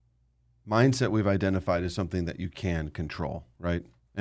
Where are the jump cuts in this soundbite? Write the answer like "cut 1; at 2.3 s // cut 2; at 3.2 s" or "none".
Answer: none